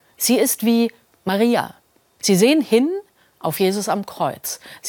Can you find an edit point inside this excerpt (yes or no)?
yes